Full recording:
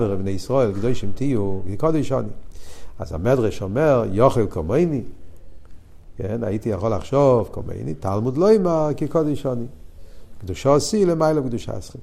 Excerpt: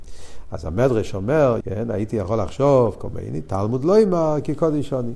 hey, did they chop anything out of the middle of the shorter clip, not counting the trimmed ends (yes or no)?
yes